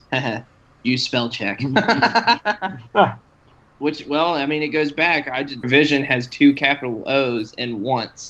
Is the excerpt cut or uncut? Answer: cut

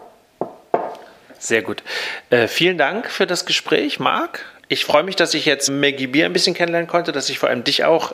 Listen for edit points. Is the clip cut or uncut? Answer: cut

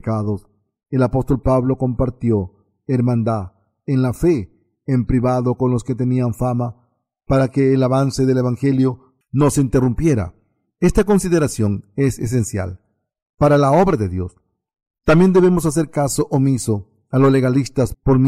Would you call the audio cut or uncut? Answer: uncut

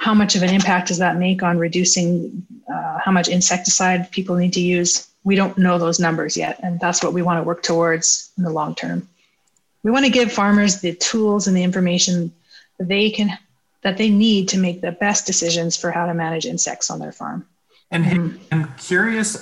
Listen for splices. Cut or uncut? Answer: uncut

